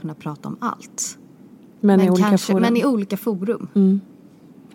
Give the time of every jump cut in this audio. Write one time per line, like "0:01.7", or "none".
none